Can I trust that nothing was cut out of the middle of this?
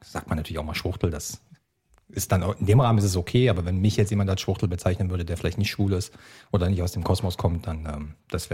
yes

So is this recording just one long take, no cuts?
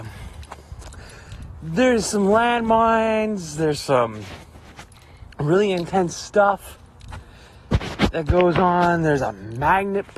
no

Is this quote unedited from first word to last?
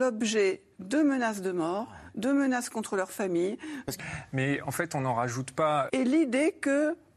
no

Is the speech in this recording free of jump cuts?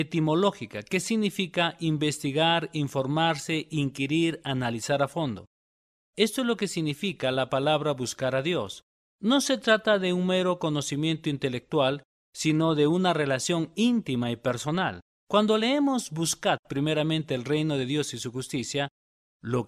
yes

